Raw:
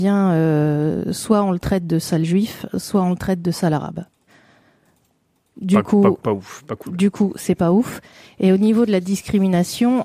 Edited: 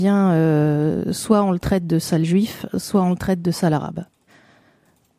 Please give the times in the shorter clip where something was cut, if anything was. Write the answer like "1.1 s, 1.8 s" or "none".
none